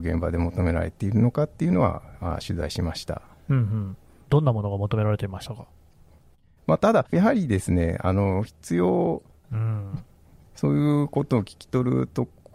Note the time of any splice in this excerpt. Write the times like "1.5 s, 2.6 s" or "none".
7.1 s, 9.4 s